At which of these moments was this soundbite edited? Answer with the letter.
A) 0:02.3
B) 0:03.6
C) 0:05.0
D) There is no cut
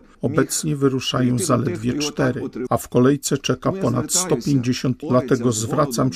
C